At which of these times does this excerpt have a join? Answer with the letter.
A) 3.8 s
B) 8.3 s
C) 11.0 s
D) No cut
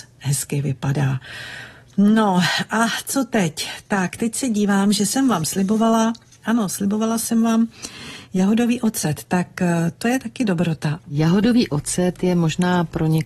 C